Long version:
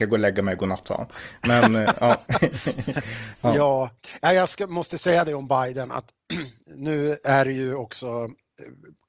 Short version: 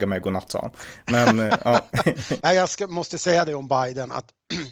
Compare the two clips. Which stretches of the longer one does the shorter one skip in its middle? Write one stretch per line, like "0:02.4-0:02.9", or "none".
0:02.7-0:04.2